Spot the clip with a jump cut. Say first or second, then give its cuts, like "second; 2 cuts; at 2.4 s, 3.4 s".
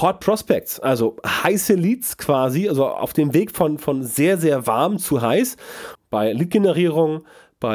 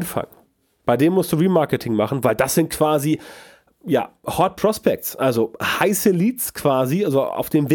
first; 1 cut; at 6.0 s